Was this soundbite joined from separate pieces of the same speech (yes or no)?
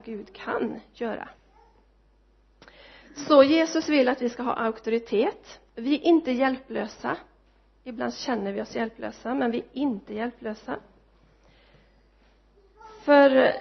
no